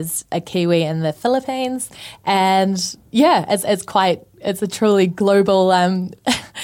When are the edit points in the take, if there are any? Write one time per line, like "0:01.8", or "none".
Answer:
none